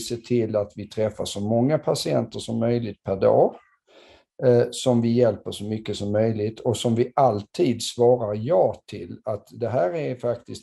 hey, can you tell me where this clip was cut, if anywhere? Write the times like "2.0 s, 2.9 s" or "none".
none